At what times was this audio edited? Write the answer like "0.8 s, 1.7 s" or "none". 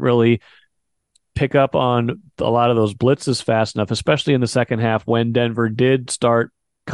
none

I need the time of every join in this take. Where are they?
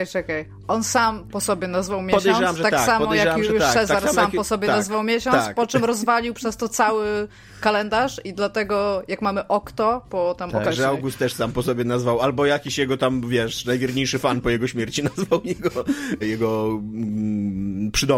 10.6 s, 16.2 s

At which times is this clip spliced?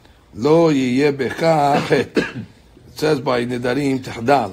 none

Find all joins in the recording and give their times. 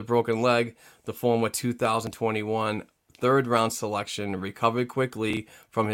none

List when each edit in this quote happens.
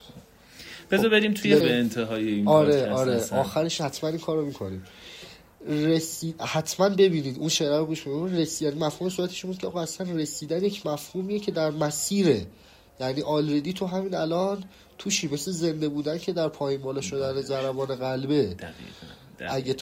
1.6 s

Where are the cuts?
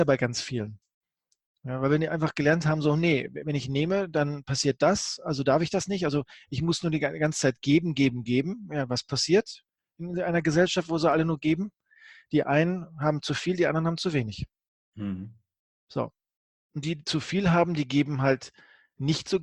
none

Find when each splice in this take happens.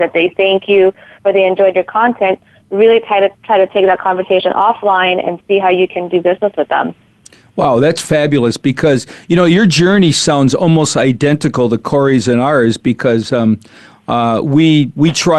none

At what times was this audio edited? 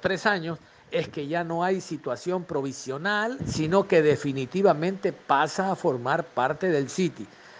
3.4 s

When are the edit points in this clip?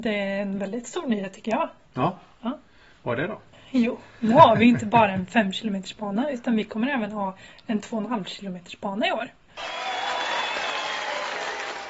3.5 s

